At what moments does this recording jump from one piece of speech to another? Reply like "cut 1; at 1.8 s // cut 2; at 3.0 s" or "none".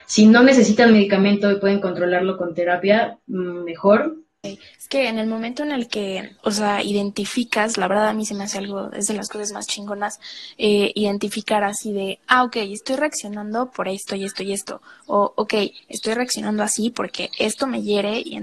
cut 1; at 4.4 s // cut 2; at 6.4 s